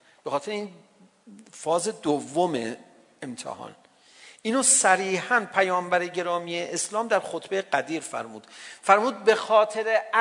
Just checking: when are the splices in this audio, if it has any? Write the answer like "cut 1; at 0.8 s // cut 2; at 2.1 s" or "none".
none

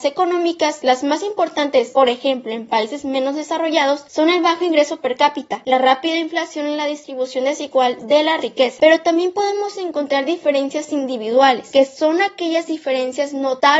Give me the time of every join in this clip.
none

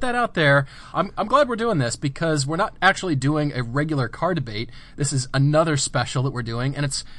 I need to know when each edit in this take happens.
cut 1; at 0.9 s

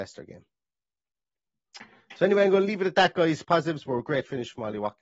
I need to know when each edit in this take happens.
cut 1; at 3.4 s

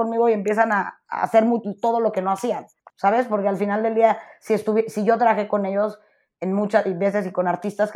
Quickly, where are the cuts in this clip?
cut 1; at 2.9 s

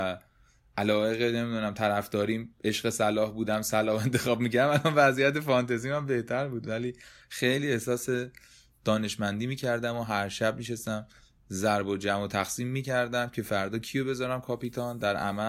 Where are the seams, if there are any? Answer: none

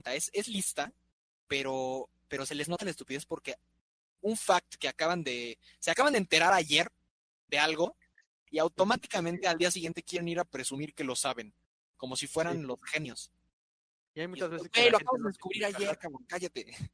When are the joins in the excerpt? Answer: none

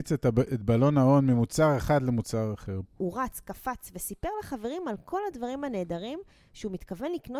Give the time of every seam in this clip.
cut 1; at 2.8 s

